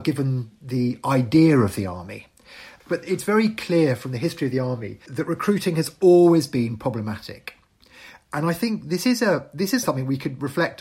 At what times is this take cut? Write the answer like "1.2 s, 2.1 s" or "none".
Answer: 2.8 s, 5.1 s, 9.8 s